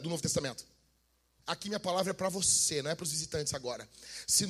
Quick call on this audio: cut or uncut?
cut